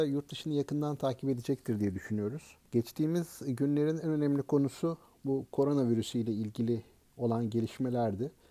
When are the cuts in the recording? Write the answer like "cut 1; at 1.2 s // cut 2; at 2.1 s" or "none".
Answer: cut 1; at 2.7 s